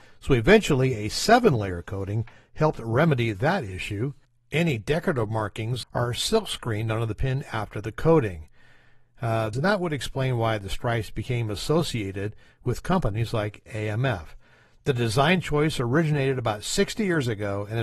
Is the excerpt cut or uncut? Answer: cut